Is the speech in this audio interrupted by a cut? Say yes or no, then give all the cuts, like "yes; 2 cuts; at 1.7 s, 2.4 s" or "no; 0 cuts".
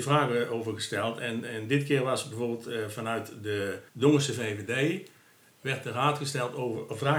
yes; 1 cut; at 3.9 s